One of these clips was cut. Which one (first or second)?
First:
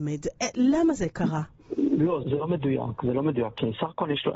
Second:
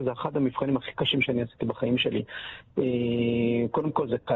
first